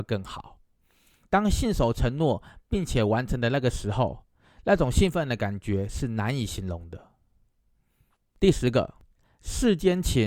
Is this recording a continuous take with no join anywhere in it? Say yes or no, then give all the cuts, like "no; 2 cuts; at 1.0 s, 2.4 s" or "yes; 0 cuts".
yes; 0 cuts